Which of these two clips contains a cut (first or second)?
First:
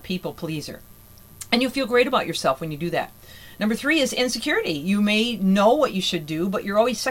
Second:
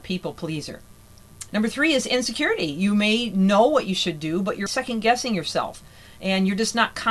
second